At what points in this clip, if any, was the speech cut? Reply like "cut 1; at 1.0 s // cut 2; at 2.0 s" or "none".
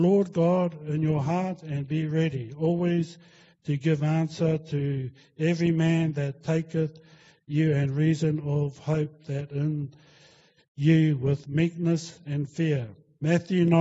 none